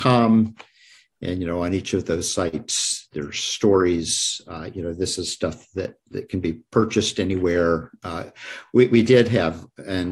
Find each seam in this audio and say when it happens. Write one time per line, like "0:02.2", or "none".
none